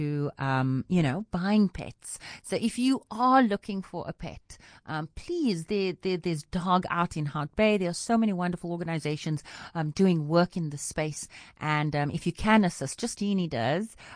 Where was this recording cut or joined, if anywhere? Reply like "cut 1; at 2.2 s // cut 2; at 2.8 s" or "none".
cut 1; at 13.1 s